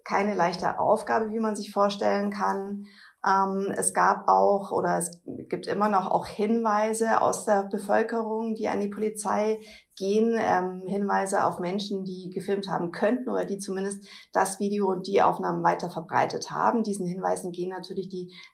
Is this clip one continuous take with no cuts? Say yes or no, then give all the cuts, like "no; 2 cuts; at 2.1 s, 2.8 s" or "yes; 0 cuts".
yes; 0 cuts